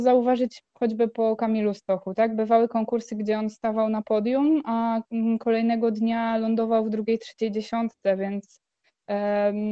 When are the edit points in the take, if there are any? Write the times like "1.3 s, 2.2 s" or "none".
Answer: none